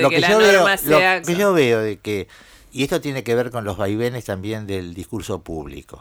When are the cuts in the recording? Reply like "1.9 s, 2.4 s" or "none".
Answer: 1.2 s